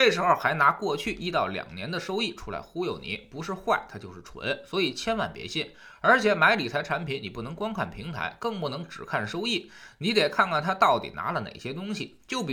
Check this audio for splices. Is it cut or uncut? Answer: uncut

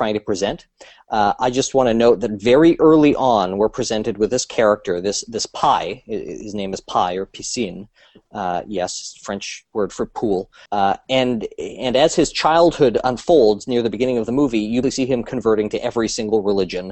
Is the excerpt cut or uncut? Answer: cut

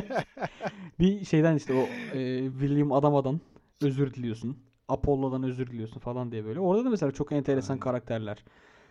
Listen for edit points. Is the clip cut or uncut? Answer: uncut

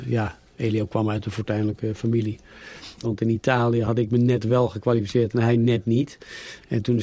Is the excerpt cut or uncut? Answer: cut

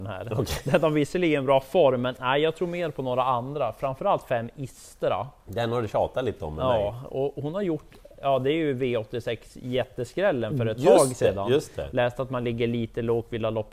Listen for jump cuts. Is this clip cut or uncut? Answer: cut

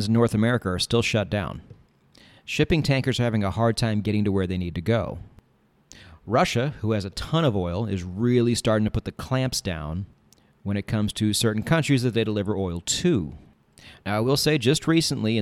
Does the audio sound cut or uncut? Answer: uncut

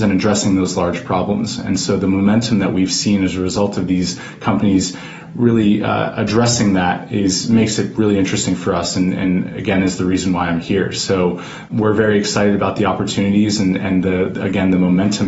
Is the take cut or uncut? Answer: uncut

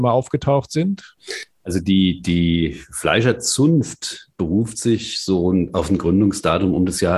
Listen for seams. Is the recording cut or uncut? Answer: uncut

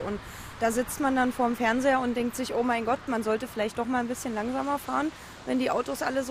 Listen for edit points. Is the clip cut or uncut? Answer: uncut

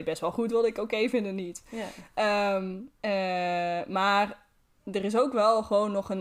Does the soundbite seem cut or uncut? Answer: cut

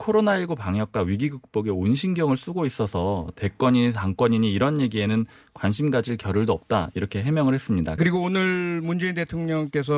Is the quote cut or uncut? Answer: cut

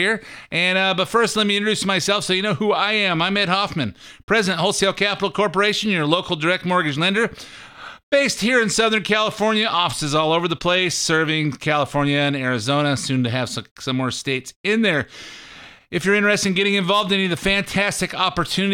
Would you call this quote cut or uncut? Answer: uncut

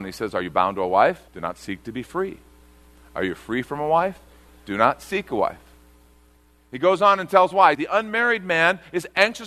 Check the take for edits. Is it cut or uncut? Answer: cut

